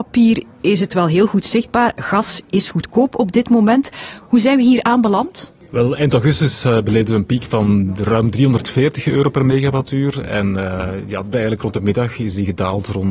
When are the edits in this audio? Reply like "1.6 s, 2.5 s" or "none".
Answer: 11.3 s